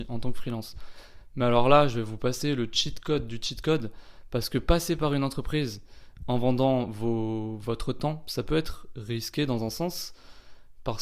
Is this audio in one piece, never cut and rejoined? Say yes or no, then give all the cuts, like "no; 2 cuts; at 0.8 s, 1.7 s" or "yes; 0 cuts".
yes; 0 cuts